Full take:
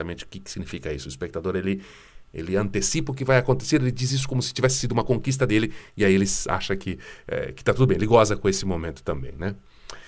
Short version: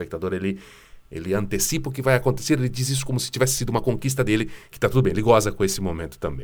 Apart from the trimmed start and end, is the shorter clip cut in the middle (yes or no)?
yes